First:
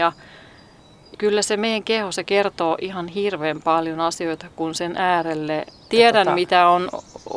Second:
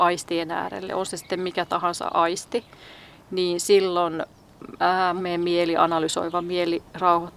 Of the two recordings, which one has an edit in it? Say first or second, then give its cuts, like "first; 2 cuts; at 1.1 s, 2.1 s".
second; 1 cut; at 5.2 s